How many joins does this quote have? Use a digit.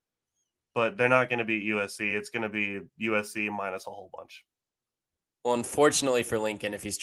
0